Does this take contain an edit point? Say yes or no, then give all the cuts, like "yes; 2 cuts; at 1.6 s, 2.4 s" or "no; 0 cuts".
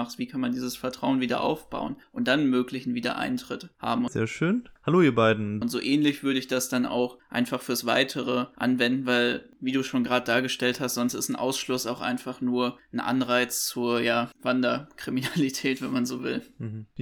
yes; 2 cuts; at 4.1 s, 5.6 s